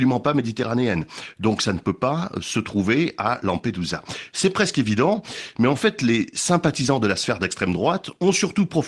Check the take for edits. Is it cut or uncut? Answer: uncut